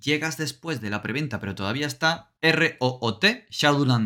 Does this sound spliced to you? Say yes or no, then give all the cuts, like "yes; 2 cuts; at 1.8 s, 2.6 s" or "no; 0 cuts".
yes; 1 cut; at 2.4 s